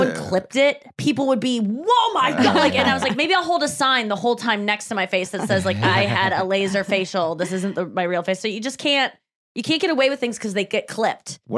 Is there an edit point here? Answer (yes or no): no